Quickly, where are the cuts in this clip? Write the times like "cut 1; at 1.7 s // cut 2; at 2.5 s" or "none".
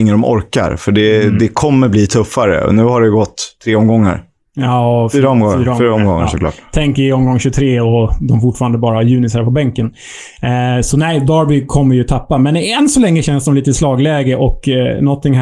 cut 1; at 3.6 s